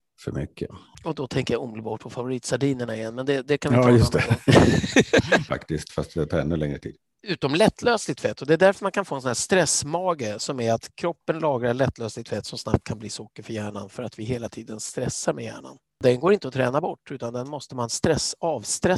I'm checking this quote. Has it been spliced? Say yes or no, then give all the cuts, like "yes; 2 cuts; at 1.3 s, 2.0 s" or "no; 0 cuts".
yes; 1 cut; at 5.5 s